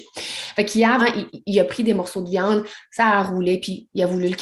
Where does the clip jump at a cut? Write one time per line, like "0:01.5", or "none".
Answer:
0:01.0